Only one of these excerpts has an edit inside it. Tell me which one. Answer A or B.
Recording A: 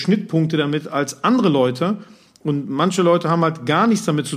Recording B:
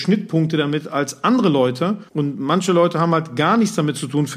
B